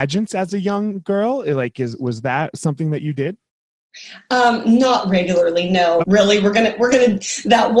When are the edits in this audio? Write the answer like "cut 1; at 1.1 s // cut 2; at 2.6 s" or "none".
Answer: cut 1; at 6.0 s